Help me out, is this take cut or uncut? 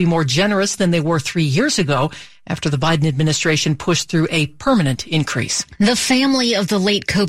uncut